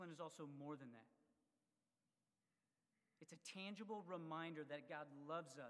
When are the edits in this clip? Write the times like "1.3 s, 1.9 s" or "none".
none